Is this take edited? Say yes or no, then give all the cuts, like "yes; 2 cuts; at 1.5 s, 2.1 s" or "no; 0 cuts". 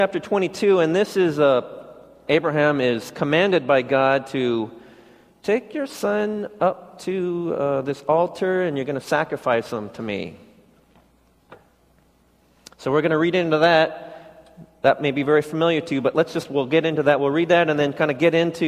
yes; 1 cut; at 2.3 s